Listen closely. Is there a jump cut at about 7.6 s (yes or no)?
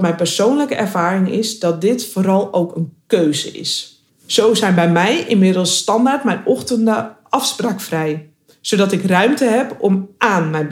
no